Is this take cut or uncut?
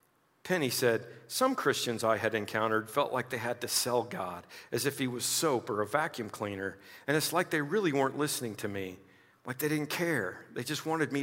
uncut